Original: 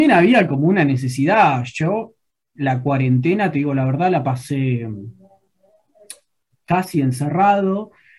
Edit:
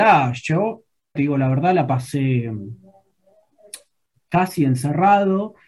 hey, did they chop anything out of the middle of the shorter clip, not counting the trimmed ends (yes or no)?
yes